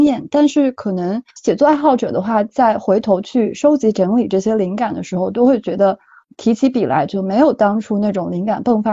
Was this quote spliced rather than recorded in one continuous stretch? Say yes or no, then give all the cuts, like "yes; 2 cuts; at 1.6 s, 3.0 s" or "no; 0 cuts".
no; 0 cuts